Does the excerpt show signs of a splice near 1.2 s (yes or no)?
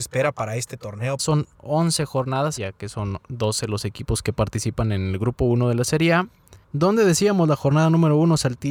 yes